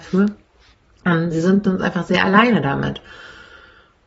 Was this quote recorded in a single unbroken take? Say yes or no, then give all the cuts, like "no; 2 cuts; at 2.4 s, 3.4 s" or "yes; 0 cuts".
no; 1 cut; at 1.3 s